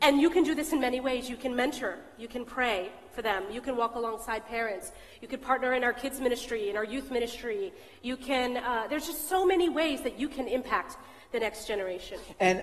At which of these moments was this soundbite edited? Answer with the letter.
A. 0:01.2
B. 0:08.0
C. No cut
C